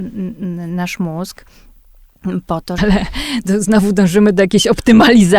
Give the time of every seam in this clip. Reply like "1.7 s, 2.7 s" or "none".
2.8 s